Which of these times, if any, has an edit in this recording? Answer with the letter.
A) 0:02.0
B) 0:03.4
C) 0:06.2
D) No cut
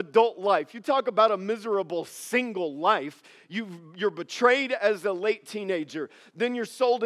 D